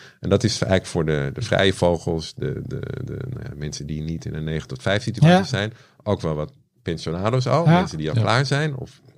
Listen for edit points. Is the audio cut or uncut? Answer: uncut